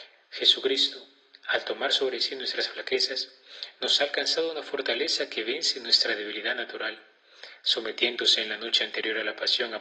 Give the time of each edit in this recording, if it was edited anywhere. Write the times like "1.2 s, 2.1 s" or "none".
none